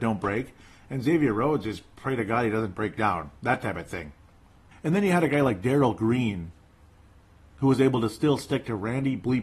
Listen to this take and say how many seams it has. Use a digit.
1